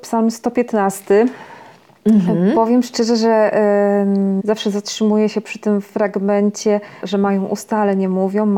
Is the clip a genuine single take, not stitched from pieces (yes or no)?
no